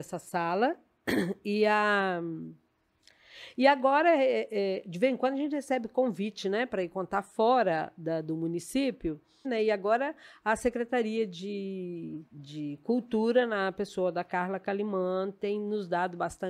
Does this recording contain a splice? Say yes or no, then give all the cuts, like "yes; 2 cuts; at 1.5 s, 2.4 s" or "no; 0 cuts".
yes; 2 cuts; at 9.4 s, 12.3 s